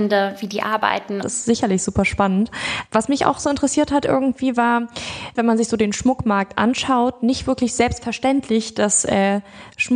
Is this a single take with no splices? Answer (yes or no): no